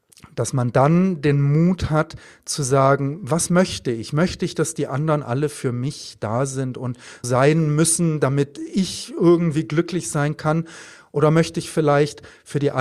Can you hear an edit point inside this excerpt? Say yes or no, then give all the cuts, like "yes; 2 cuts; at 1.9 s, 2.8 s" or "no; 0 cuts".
yes; 1 cut; at 7.2 s